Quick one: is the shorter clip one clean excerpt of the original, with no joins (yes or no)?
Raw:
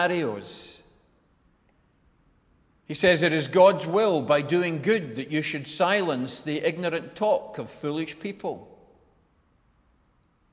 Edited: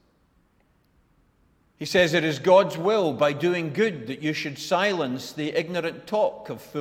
yes